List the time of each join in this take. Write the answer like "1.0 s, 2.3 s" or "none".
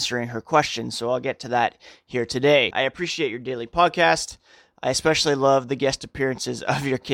2.7 s